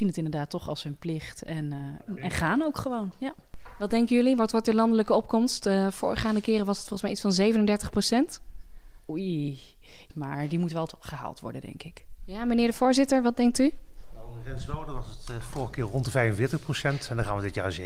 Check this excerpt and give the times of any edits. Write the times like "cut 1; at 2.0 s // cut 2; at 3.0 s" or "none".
cut 1; at 10.1 s